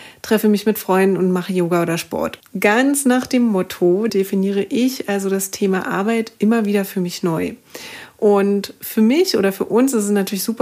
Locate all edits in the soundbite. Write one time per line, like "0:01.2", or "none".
0:02.4
0:04.1